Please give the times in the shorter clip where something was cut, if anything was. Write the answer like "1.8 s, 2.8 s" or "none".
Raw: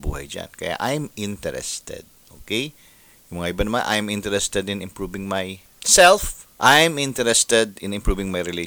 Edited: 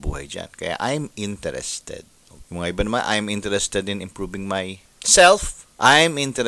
2.4 s